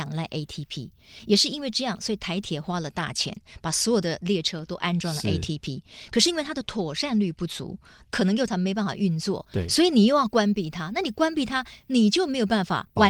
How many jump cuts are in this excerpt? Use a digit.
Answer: 1